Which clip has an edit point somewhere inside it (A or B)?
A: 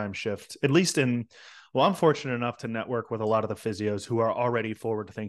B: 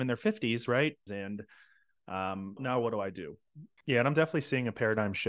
B